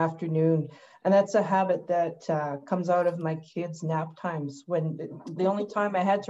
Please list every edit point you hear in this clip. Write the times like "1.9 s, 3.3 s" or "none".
5.4 s